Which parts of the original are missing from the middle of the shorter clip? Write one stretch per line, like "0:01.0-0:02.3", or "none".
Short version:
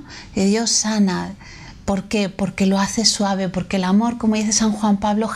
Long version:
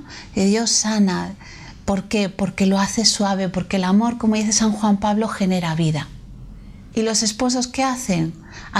none